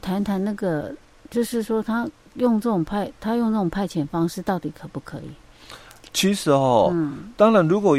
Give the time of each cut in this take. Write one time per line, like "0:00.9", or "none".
0:06.1